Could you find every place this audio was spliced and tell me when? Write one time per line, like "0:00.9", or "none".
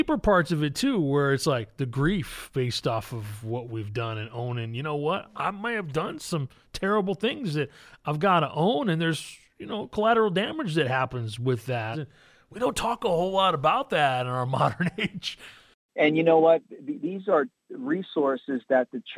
0:11.9

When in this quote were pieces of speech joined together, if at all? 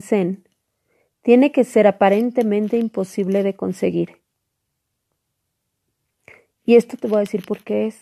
none

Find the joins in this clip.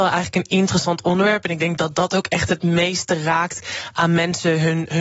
none

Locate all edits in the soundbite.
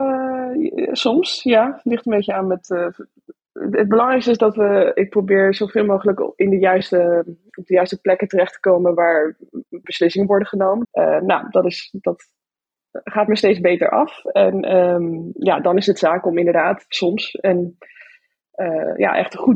0:09.8
0:10.8

